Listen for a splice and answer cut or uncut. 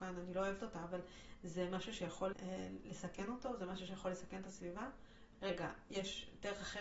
cut